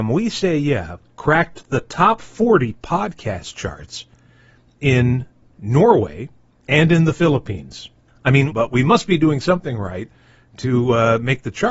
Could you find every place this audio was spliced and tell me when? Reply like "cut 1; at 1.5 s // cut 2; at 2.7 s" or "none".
cut 1; at 8.5 s